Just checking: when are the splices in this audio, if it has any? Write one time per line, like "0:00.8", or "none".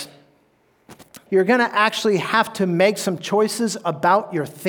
0:01.3